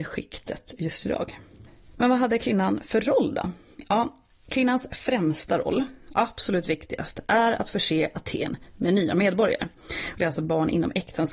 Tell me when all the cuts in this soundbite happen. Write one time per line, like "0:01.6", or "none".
none